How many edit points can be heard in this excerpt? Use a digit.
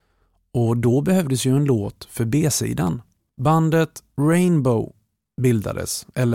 1